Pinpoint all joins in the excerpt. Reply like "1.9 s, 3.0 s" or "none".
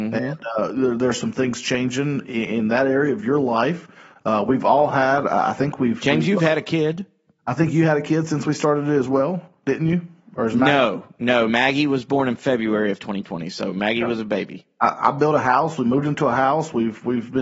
none